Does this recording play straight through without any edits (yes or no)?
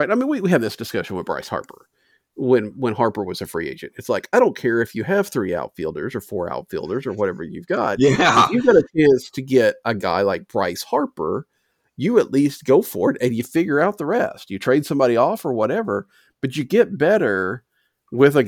yes